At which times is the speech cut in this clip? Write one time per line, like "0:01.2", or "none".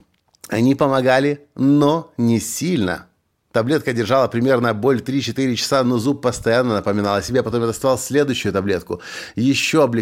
none